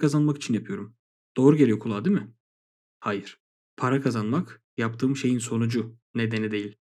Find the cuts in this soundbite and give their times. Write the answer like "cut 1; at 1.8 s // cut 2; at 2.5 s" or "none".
none